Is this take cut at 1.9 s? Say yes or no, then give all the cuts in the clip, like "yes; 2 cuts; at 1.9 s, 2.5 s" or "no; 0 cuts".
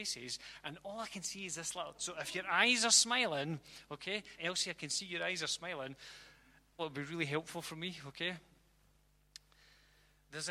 no; 2 cuts; at 4.4 s, 6.8 s